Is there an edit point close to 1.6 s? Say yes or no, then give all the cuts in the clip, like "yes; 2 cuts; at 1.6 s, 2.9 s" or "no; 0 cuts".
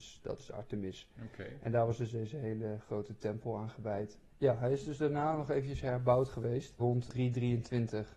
no; 2 cuts; at 4.3 s, 6.8 s